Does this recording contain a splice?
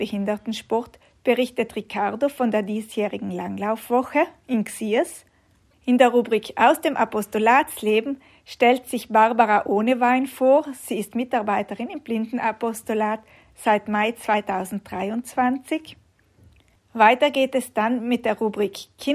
yes; 1 cut; at 16.8 s

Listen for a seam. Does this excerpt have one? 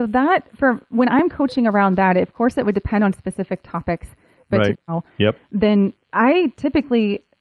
yes; 1 cut; at 4.7 s

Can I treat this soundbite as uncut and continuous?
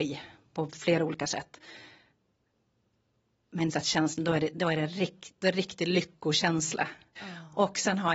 no; 2 cuts; at 3.7 s, 7.2 s

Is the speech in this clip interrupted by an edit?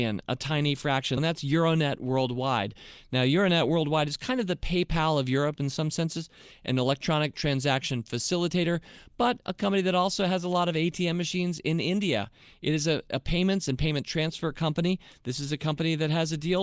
yes; 1 cut; at 1.2 s

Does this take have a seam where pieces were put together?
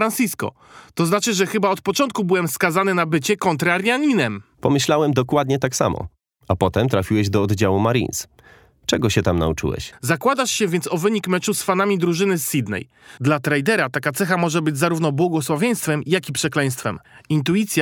yes; 2 cuts; at 9.9 s, 13.2 s

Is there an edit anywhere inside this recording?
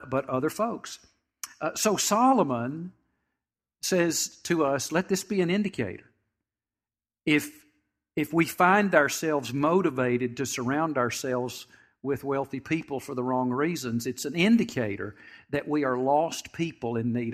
no; 0 cuts

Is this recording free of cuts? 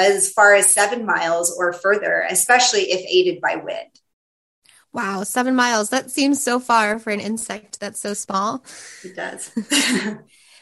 yes; 0 cuts

